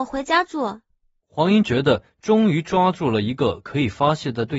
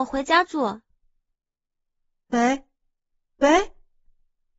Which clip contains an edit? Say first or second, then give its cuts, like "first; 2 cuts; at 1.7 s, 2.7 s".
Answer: first; 1 cut; at 1.2 s